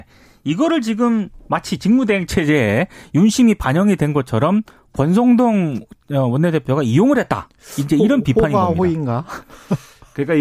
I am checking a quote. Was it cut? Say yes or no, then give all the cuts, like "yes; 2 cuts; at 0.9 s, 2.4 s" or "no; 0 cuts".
no; 0 cuts